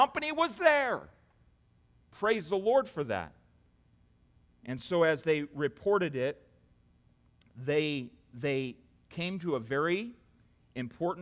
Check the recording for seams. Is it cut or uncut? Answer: uncut